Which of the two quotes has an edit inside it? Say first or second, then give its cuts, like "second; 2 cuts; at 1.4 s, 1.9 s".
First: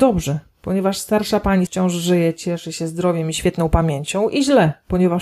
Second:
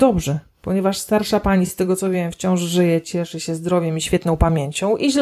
first; 1 cut; at 1.7 s